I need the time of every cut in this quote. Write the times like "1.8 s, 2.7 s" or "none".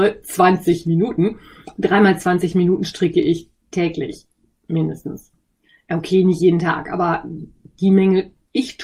none